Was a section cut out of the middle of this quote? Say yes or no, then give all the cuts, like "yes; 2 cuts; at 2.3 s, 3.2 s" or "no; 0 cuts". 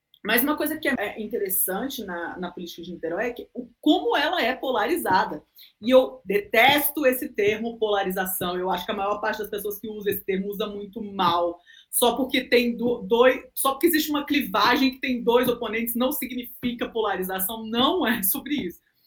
yes; 1 cut; at 1.0 s